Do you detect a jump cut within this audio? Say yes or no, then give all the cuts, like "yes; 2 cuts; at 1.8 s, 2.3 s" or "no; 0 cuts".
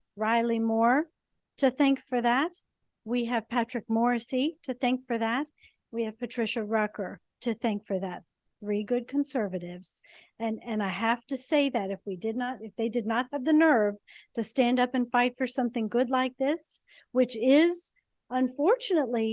no; 0 cuts